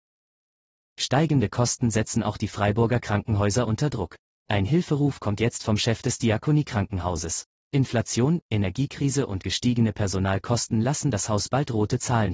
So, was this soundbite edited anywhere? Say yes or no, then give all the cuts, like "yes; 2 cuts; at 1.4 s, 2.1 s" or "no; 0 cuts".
no; 0 cuts